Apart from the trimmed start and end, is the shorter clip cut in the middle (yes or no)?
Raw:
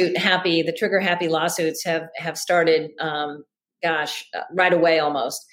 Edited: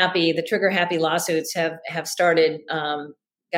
no